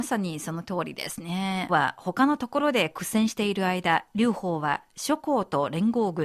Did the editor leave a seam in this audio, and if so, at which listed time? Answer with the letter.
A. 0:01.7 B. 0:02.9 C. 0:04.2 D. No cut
A